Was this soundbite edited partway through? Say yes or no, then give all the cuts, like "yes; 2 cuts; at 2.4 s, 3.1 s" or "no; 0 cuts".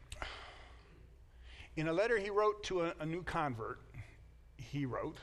no; 0 cuts